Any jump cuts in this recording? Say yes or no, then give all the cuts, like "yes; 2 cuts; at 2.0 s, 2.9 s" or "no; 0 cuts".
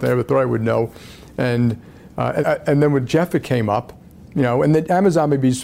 yes; 1 cut; at 2.4 s